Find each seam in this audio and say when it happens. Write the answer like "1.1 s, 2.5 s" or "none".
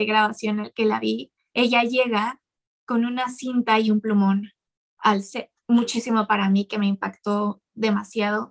5.6 s